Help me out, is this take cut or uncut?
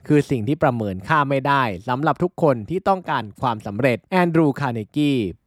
cut